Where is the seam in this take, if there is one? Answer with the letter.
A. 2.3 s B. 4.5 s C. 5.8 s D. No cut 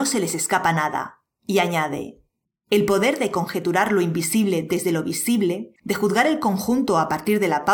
C